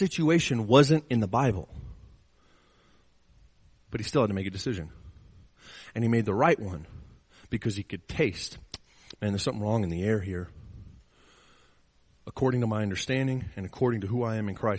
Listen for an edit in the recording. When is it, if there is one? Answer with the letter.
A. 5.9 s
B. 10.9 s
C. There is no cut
C